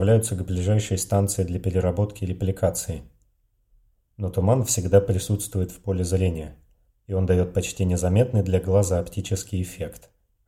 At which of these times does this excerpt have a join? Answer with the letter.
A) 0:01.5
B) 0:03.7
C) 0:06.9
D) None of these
D